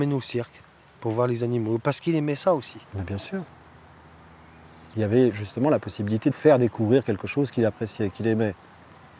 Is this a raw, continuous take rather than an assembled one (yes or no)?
yes